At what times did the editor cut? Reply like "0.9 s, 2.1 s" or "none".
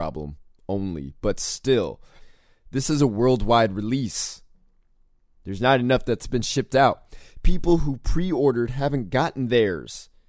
5.3 s